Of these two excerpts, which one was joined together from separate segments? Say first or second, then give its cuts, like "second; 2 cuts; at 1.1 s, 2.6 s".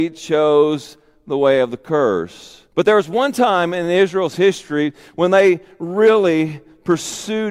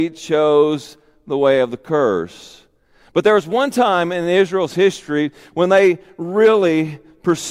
first; 1 cut; at 2.7 s